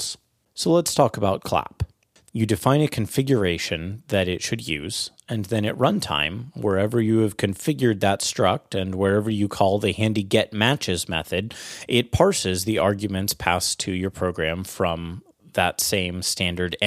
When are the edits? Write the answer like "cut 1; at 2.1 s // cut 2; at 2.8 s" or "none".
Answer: cut 1; at 2.3 s